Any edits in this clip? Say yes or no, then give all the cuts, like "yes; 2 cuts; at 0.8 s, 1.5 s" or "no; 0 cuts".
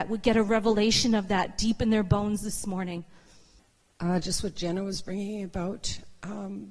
no; 0 cuts